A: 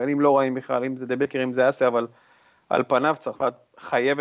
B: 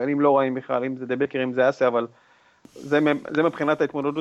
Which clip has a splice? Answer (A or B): B